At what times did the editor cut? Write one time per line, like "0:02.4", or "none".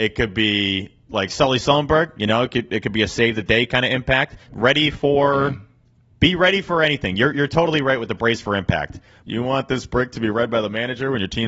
0:04.5
0:09.2